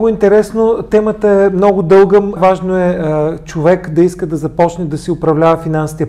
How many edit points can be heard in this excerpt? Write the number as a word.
one